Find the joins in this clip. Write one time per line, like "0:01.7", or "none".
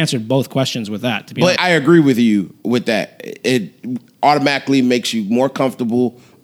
0:01.6